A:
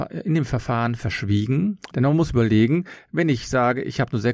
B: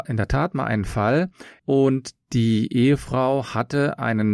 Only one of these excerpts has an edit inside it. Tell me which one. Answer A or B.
A